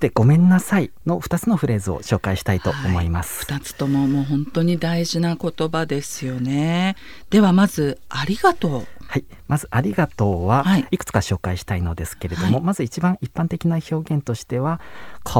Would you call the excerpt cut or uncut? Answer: uncut